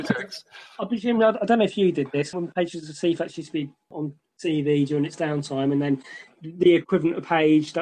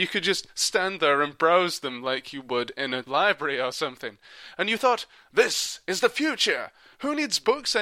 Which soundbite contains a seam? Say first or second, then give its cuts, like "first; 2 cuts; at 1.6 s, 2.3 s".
first; 1 cut; at 2.3 s